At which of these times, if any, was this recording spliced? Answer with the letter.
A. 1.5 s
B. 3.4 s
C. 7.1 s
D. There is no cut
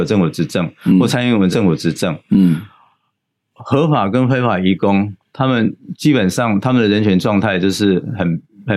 A